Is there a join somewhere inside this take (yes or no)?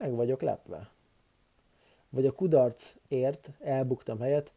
no